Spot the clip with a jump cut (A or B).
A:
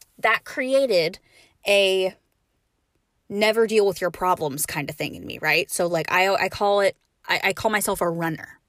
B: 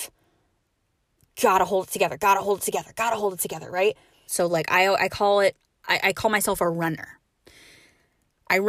B